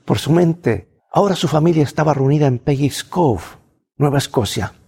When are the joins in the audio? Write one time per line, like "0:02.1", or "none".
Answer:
0:01.0